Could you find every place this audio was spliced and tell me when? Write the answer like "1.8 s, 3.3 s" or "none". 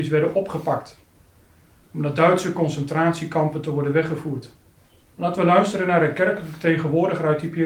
5.0 s